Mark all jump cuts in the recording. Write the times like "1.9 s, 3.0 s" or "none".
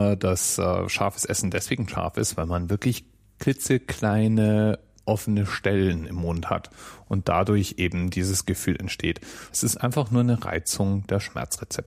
9.5 s